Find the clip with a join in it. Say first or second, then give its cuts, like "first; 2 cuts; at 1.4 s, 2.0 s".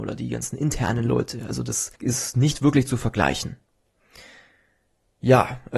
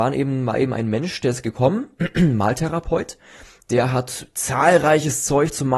first; 1 cut; at 1.9 s